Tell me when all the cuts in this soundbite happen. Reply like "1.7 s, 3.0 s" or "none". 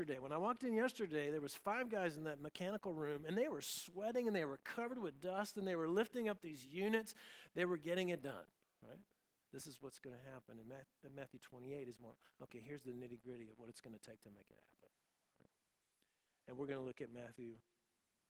9.4 s